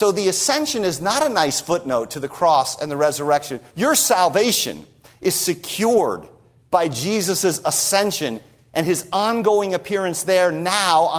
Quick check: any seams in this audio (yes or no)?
yes